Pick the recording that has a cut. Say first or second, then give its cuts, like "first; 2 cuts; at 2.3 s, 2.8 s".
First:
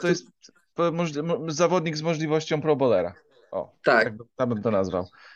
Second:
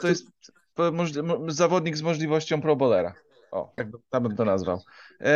second; 1 cut; at 3.8 s